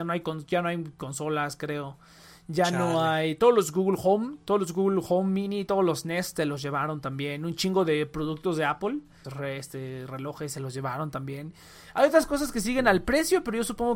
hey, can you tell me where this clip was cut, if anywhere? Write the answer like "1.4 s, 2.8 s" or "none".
9.2 s